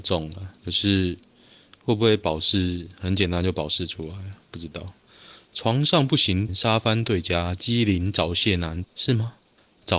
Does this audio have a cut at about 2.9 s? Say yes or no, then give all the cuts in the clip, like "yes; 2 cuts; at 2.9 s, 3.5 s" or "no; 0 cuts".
no; 2 cuts; at 6.5 s, 8.8 s